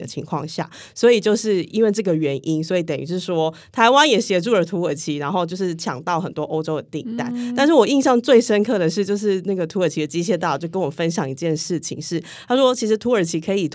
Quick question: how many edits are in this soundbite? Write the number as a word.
zero